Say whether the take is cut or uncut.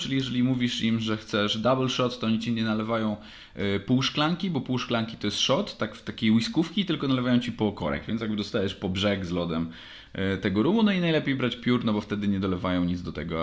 uncut